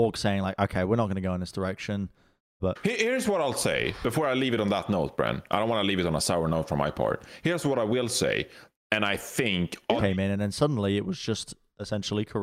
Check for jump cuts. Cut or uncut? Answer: cut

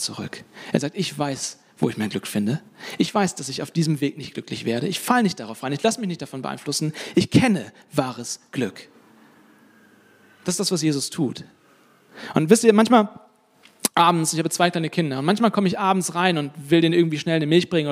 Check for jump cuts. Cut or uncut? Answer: uncut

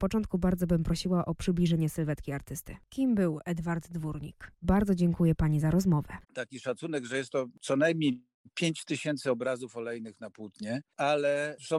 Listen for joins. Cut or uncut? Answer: cut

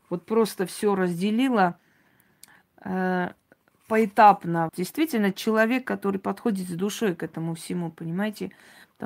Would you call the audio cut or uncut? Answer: cut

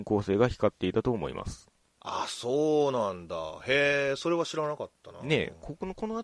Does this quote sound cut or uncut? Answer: uncut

